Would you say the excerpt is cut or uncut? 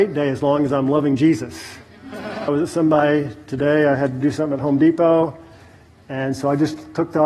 cut